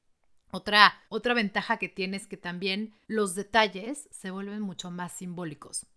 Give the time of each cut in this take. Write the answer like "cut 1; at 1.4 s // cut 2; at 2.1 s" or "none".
cut 1; at 1.0 s // cut 2; at 3.0 s